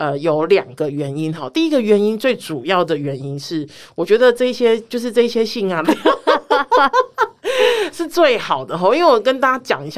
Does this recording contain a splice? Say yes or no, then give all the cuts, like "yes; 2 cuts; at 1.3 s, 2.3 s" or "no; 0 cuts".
yes; 1 cut; at 5.8 s